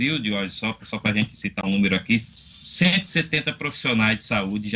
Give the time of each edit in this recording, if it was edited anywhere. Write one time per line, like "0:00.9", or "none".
0:01.6